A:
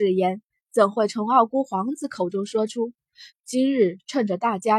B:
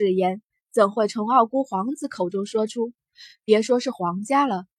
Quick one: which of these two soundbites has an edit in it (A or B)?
A